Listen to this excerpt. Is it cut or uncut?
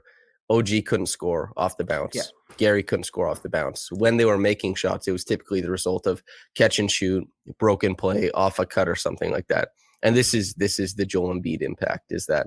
uncut